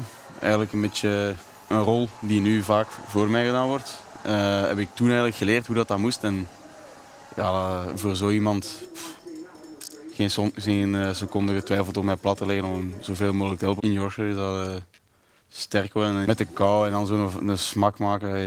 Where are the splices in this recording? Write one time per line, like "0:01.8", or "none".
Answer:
0:13.8
0:16.2